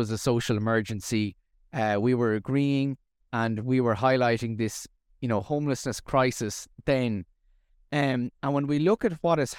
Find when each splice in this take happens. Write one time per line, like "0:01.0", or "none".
none